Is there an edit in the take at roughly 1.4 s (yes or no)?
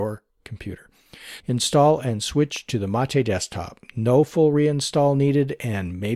yes